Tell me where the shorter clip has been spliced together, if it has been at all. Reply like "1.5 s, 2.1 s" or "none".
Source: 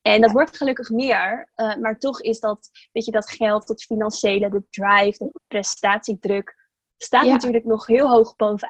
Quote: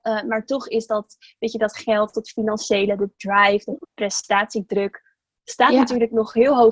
none